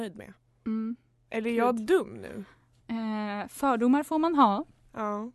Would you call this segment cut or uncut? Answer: uncut